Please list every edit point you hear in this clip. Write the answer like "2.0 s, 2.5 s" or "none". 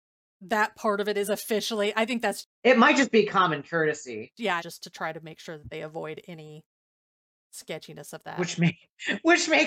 4.6 s